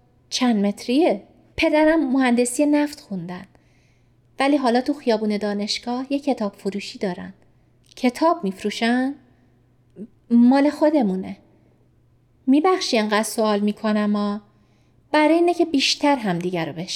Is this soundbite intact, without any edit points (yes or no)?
no